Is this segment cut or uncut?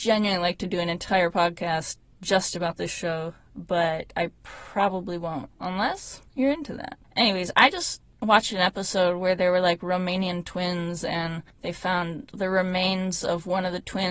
uncut